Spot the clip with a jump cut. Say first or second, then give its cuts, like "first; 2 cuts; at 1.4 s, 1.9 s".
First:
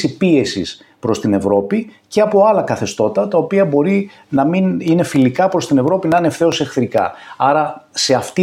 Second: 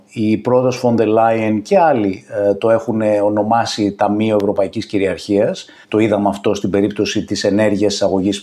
second; 1 cut; at 5.8 s